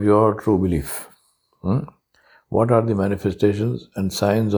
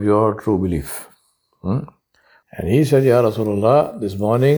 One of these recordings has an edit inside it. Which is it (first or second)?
second